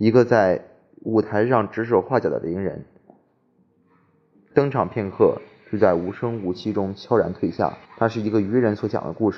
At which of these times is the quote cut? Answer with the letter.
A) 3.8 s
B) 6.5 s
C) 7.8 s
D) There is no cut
C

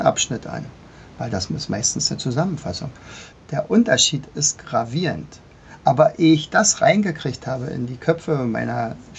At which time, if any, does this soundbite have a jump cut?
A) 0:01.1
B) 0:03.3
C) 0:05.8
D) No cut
B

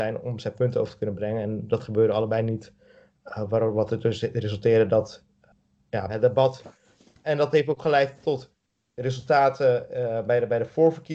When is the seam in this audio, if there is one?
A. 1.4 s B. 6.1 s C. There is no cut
B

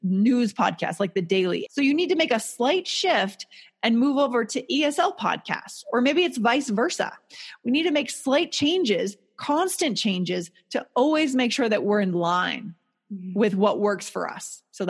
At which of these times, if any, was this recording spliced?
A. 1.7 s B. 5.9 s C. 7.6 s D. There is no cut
A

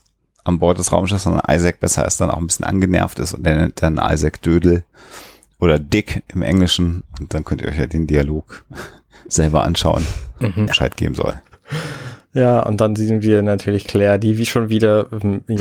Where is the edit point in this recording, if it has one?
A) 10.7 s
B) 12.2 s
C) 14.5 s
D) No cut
A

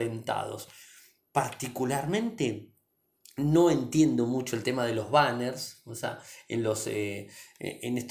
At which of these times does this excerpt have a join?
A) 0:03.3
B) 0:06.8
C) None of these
C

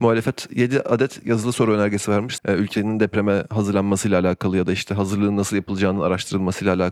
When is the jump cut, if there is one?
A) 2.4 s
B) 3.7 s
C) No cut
A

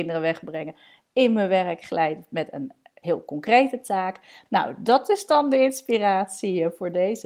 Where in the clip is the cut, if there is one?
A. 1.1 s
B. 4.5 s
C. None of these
B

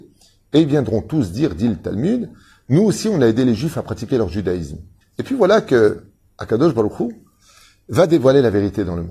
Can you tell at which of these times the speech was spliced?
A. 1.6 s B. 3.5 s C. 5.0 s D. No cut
C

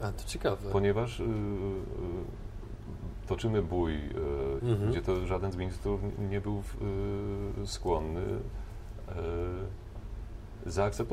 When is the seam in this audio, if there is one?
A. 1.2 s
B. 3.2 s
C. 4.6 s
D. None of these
C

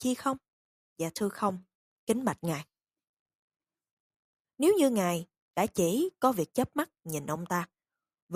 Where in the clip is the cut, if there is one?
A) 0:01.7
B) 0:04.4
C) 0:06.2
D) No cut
B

